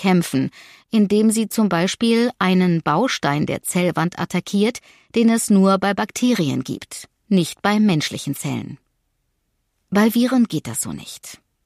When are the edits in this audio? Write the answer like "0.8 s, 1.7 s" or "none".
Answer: none